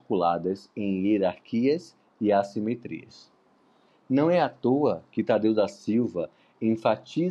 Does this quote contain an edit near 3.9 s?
yes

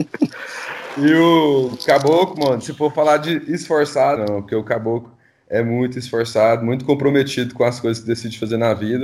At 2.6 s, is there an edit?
no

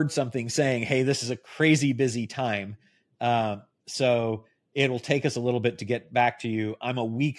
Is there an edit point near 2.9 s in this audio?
no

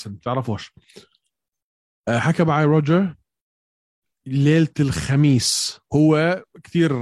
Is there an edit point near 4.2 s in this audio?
no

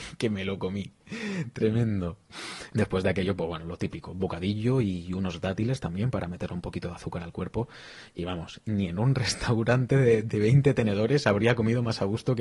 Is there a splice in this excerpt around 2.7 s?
yes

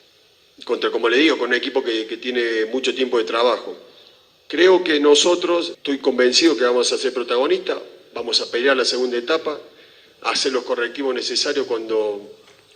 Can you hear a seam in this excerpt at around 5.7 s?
yes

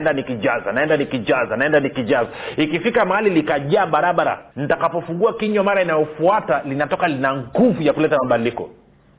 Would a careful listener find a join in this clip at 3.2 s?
no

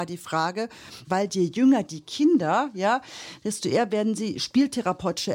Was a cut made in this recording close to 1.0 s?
yes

